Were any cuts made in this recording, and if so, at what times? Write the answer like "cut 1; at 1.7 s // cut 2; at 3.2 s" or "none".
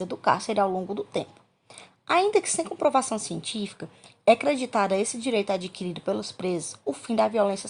none

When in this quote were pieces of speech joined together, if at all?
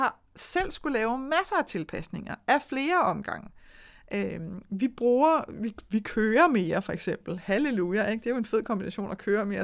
none

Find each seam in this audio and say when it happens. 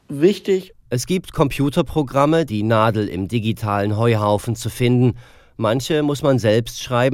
cut 1; at 2.5 s

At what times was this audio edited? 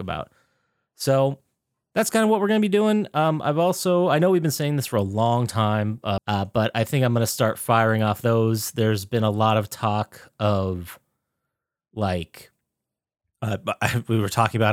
cut 1; at 6.2 s

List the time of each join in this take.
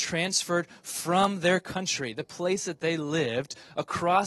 none

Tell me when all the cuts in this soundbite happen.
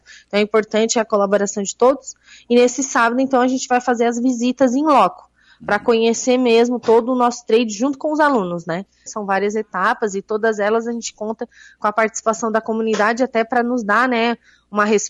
cut 1; at 9.1 s

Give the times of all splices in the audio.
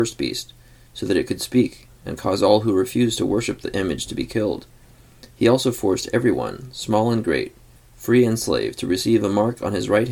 cut 1; at 7.8 s

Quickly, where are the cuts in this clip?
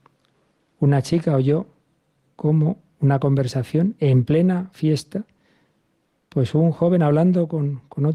none

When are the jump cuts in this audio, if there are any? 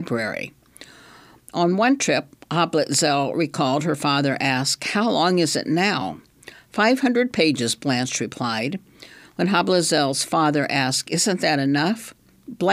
none

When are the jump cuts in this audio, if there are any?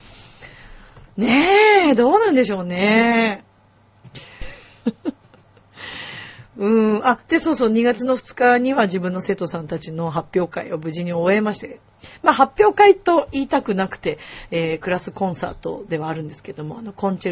cut 1; at 4.4 s

